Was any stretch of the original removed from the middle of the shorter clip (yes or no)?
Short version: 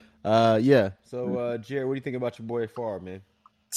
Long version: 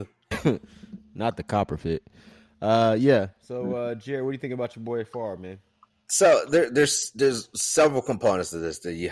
no